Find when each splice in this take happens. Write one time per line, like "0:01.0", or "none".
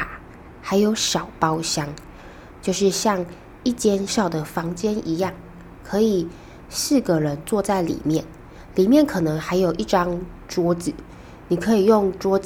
0:04.1